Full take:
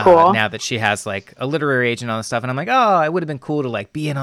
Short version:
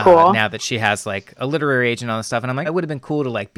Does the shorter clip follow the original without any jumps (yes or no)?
no